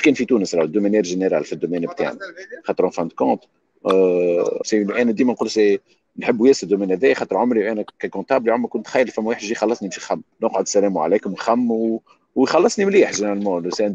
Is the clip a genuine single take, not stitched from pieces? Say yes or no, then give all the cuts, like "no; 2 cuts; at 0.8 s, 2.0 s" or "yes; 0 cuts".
no; 2 cuts; at 4.6 s, 10.3 s